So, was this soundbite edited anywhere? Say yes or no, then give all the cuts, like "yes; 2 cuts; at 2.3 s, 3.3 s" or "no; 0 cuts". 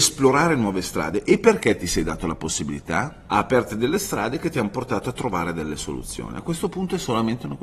yes; 1 cut; at 3.3 s